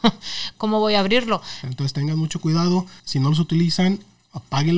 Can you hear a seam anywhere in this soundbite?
yes; 2 cuts; at 1.6 s, 3.0 s

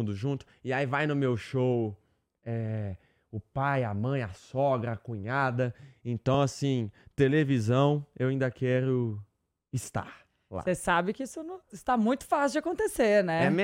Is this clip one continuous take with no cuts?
yes; 0 cuts

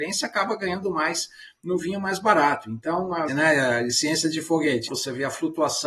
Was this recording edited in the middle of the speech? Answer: yes; 2 cuts; at 3.3 s, 4.9 s

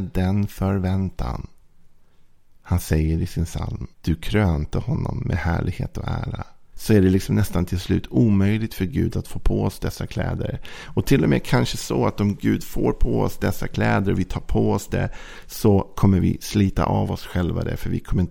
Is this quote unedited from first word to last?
no; 2 cuts; at 3.9 s, 6.7 s

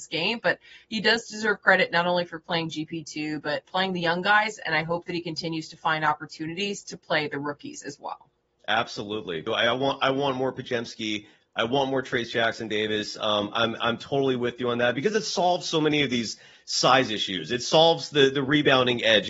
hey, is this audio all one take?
no; 1 cut; at 9.5 s

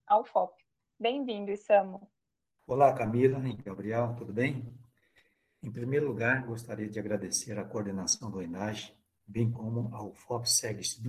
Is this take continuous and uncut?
yes; 0 cuts

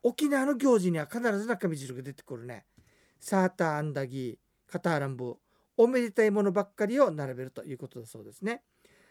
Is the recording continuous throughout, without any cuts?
yes; 0 cuts

